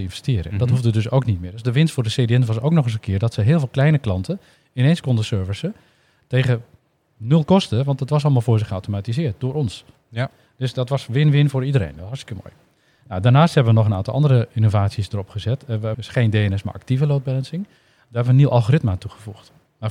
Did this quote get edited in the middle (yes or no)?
yes